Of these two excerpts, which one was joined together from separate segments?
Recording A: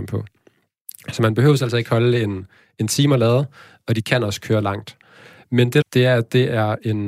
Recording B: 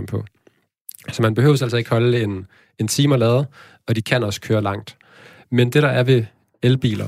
A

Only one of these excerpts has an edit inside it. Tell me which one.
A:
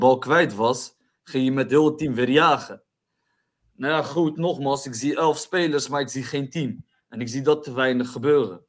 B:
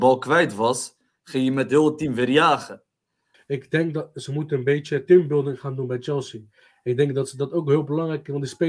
B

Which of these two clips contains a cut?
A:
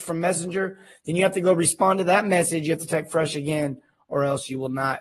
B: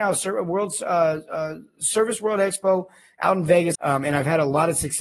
B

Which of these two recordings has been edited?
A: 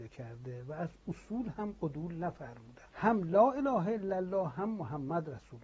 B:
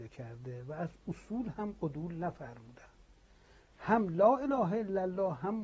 A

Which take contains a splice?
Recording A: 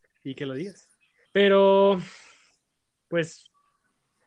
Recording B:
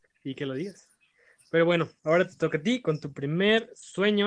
A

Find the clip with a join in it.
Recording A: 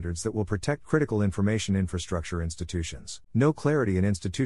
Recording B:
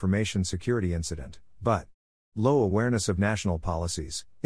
A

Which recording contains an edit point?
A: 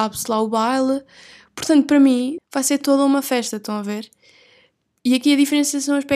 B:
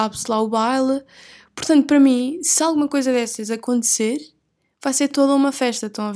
A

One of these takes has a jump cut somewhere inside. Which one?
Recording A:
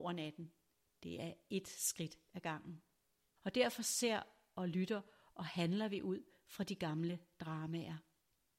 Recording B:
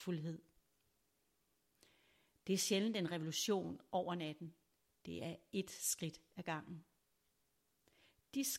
A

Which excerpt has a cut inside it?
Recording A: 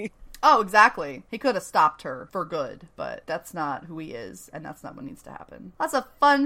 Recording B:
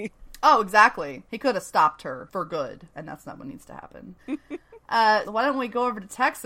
B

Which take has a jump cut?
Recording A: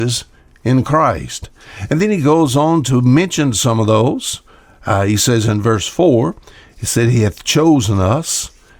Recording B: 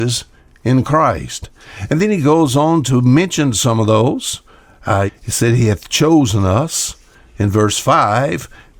B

